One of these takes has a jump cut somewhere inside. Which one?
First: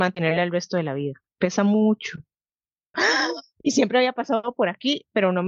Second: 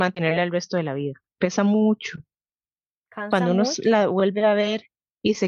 first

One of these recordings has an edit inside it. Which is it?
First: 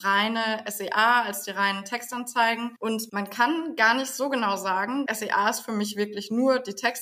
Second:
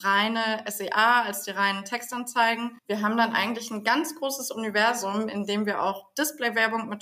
first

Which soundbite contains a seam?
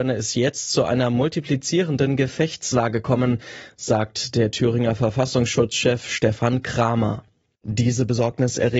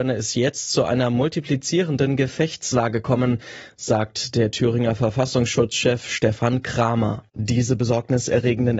second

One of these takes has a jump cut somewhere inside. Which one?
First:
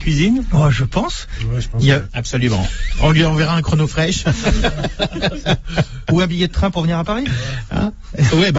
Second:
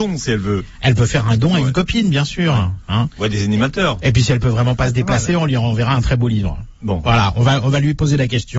first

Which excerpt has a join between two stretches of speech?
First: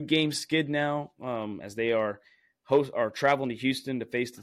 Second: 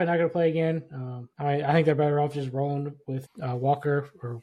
second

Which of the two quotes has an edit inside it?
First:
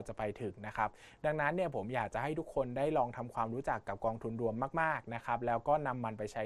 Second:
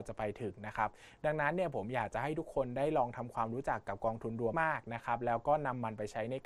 second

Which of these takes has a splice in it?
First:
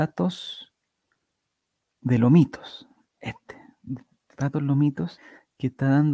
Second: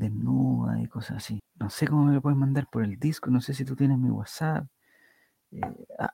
second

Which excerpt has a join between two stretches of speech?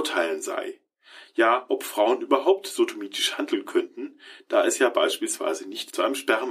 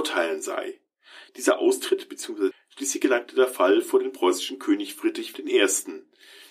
second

